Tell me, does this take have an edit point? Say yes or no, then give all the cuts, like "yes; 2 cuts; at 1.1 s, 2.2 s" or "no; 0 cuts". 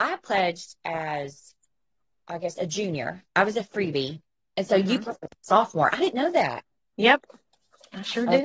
no; 0 cuts